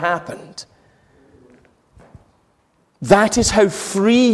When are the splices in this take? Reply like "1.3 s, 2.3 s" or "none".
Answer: none